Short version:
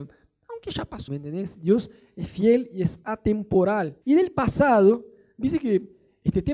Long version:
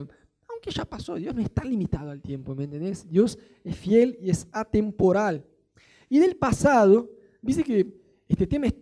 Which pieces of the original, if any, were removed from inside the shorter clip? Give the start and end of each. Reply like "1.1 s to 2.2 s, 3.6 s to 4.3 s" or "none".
1.1 s to 2.6 s, 5.5 s to 6.1 s